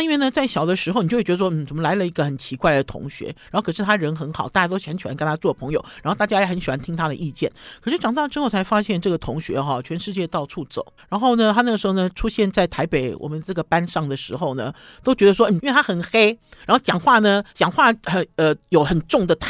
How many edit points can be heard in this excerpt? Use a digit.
2